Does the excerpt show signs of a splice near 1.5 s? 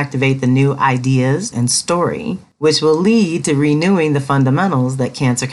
yes; 1 cut; at 1.5 s

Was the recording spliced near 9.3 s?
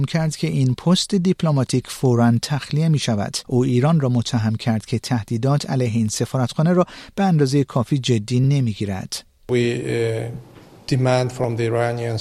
no; 1 cut; at 3.4 s

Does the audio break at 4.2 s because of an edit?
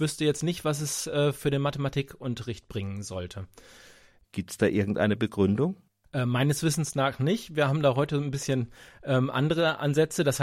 yes; 1 cut; at 4.2 s

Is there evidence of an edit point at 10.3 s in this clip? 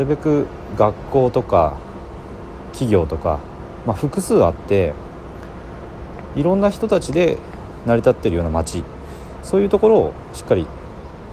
yes; 1 cut; at 10.3 s

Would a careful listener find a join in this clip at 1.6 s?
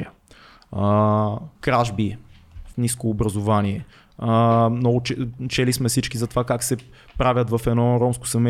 yes; 2 cuts; at 1.6 s, 2.7 s

